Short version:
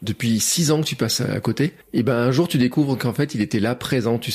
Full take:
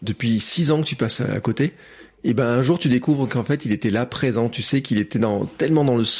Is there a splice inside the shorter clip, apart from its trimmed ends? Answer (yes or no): yes